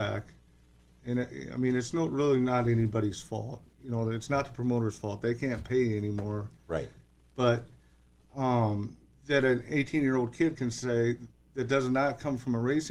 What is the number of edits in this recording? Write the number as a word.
zero